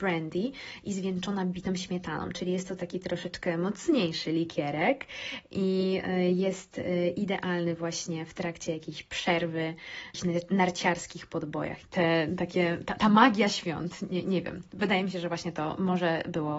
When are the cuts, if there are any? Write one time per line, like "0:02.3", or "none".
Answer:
0:11.8